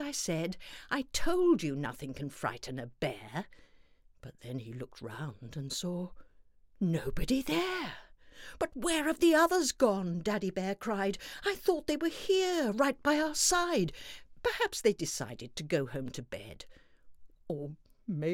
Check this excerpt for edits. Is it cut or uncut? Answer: uncut